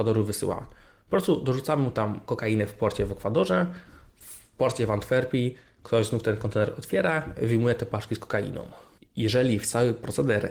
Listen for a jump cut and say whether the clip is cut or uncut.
uncut